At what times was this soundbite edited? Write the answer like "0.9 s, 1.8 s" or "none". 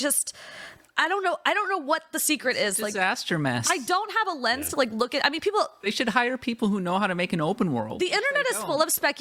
none